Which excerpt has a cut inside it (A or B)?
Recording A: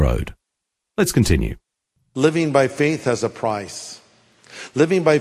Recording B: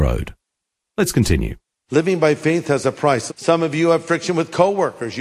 B